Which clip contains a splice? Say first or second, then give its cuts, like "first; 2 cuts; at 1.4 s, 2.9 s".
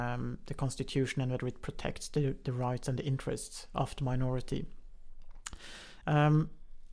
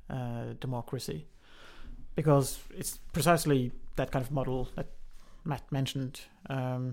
first; 1 cut; at 6.0 s